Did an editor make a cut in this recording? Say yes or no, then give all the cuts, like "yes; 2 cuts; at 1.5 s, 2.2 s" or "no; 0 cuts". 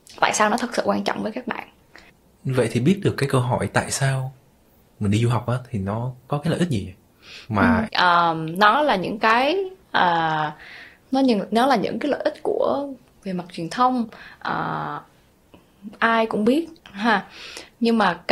yes; 3 cuts; at 7.9 s, 11.0 s, 16.8 s